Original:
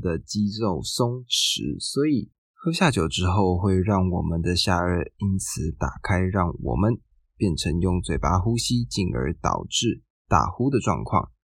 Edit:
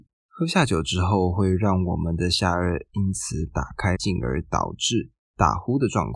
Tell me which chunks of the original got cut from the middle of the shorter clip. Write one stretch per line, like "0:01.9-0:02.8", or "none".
0:06.2-0:08.9